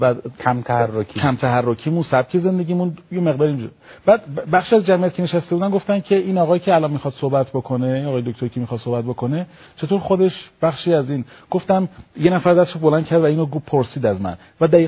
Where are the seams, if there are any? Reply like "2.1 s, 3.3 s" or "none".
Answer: none